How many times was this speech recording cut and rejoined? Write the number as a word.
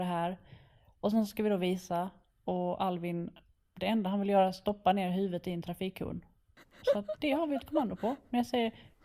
zero